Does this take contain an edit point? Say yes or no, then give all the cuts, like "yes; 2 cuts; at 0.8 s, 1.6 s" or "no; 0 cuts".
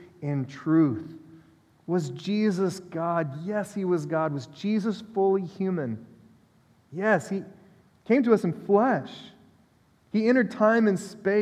no; 0 cuts